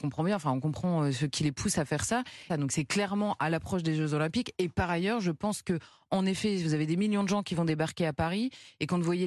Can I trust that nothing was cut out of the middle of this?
no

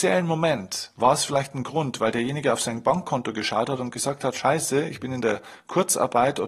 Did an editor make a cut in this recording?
no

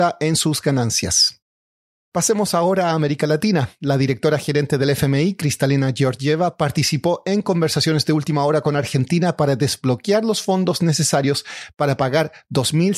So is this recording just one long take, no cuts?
yes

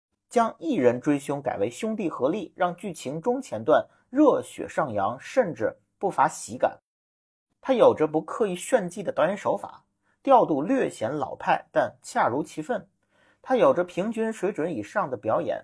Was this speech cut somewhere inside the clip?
no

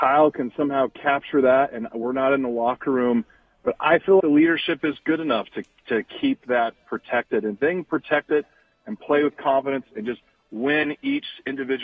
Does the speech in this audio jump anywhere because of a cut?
yes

